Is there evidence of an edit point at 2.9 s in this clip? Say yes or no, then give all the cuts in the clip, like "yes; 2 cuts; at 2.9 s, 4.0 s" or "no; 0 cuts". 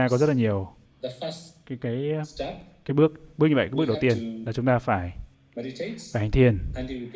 no; 0 cuts